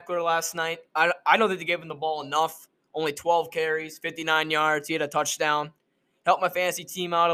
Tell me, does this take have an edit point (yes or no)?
no